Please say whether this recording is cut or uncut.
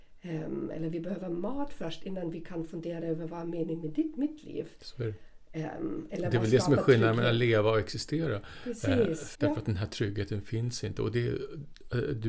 cut